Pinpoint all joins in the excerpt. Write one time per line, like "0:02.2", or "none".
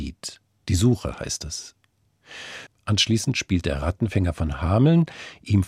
0:02.7